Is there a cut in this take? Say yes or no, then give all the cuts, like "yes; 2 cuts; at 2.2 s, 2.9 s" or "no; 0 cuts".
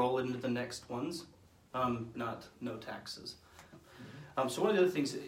yes; 2 cuts; at 2.1 s, 3.7 s